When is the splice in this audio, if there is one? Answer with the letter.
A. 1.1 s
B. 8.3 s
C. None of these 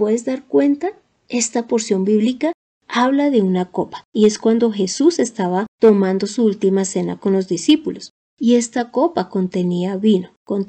C